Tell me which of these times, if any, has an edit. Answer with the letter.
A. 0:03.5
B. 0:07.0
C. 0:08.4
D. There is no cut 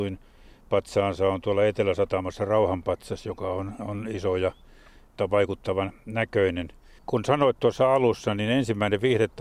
B